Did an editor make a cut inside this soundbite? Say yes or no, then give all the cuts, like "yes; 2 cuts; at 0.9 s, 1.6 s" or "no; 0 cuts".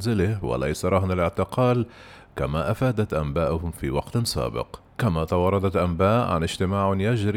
yes; 1 cut; at 4.9 s